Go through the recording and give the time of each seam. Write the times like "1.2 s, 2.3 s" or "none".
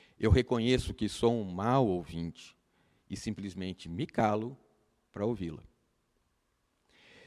none